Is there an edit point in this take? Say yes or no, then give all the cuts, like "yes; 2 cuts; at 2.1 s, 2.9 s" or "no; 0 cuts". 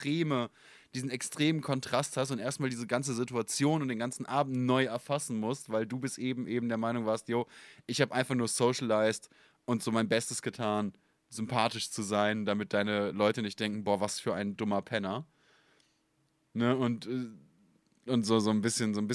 yes; 1 cut; at 18.1 s